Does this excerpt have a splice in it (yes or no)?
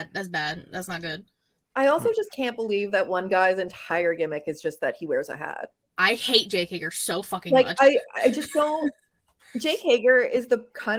no